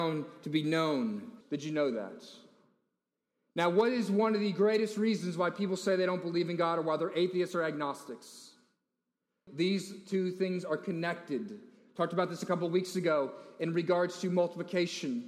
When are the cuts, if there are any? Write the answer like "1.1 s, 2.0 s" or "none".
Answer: 1.4 s, 9.5 s